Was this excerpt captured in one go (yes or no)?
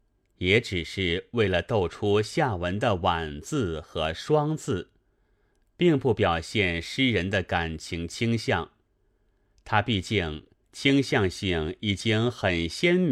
no